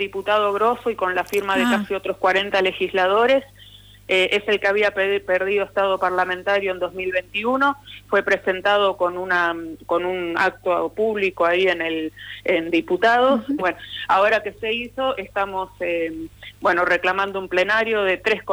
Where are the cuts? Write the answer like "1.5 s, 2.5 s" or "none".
13.6 s